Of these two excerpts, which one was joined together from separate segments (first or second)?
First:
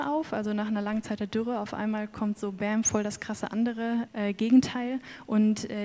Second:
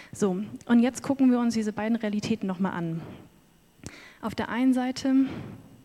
first